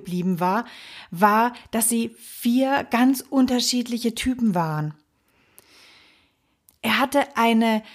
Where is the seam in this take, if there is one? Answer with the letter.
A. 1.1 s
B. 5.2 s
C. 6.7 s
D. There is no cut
C